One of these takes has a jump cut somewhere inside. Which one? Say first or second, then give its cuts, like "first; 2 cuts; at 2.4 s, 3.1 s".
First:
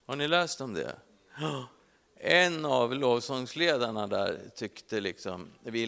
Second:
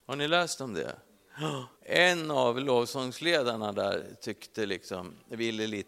second; 1 cut; at 1.8 s